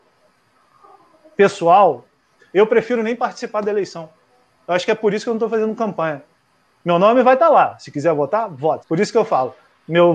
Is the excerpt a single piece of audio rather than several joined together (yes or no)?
no